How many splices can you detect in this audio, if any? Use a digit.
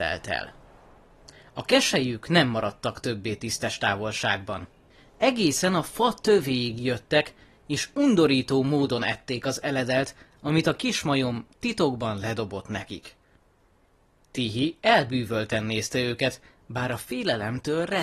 0